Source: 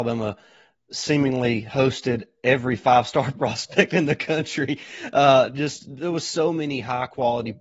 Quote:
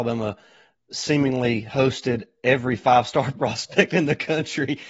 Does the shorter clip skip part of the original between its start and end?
no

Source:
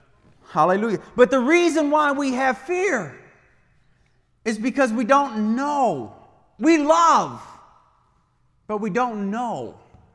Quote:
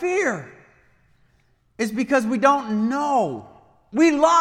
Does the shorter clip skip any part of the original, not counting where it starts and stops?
no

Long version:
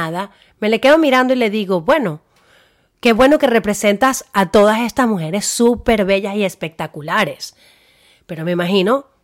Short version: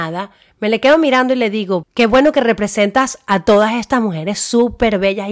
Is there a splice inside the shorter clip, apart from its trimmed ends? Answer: yes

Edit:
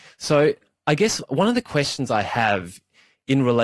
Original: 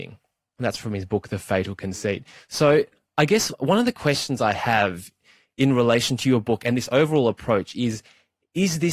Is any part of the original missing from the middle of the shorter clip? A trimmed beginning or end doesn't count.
no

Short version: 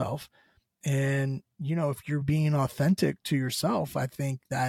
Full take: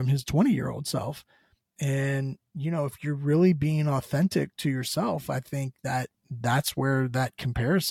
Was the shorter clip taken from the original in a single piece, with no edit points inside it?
no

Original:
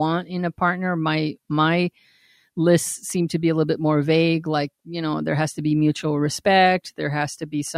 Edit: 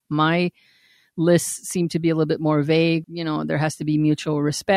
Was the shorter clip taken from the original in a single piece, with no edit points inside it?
no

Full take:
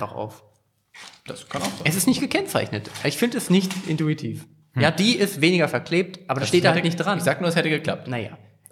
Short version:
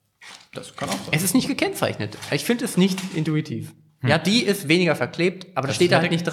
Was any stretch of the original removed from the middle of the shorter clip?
no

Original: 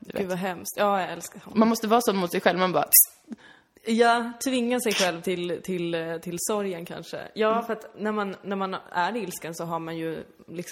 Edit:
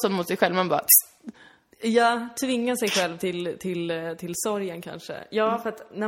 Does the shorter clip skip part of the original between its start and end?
no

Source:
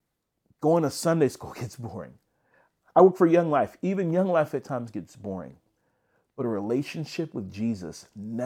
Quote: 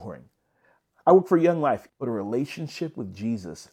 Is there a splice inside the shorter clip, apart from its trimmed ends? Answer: yes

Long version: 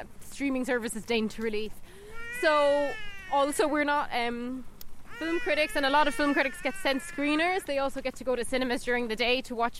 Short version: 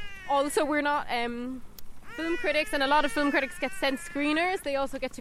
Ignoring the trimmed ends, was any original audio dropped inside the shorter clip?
no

